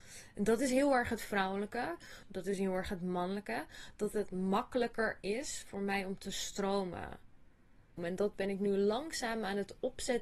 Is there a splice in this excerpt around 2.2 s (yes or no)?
yes